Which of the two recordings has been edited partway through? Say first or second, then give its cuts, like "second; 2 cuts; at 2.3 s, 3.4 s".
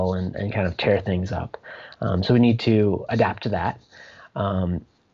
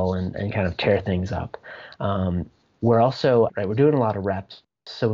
second; 2 cuts; at 2.0 s, 3.5 s